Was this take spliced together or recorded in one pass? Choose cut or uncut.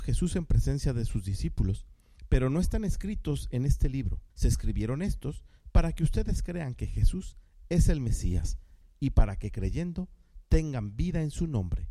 cut